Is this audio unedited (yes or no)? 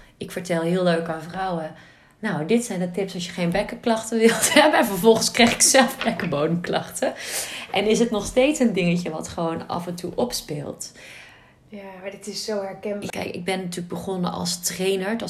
no